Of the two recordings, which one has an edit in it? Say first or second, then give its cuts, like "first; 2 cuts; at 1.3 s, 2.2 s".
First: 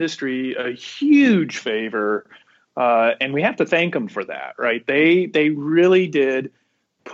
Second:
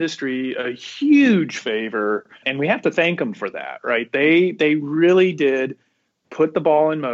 second; 1 cut; at 2.4 s